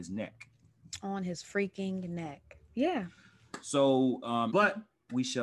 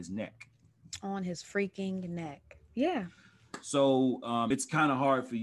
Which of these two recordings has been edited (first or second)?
first